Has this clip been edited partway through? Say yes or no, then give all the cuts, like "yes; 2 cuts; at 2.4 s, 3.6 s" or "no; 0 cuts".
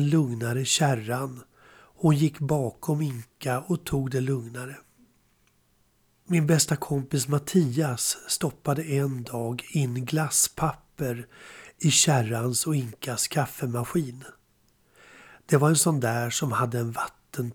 no; 0 cuts